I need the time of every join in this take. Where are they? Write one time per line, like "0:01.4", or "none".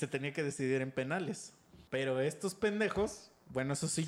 0:01.9